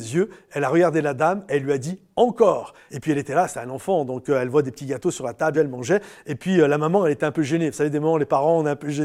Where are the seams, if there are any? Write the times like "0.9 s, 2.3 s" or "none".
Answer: 2.9 s, 5.5 s